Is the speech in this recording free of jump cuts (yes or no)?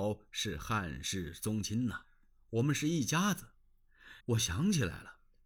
no